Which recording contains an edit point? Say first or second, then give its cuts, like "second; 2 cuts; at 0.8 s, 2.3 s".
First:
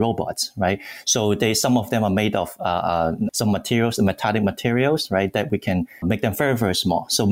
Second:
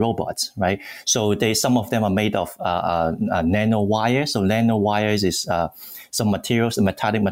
first; 2 cuts; at 3.3 s, 6.0 s